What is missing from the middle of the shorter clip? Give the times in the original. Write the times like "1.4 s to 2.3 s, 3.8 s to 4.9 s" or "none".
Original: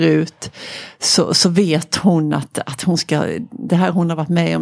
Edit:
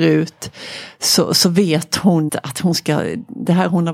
2.3 s to 2.5 s